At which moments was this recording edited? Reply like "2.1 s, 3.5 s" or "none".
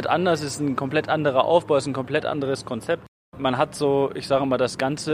none